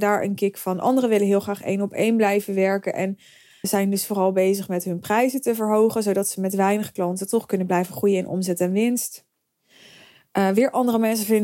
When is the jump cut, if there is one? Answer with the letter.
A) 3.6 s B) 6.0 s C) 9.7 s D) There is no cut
A